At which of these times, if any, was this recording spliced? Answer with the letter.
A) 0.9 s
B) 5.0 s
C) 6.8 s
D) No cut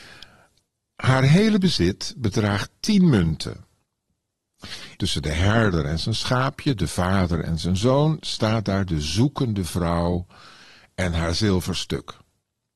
B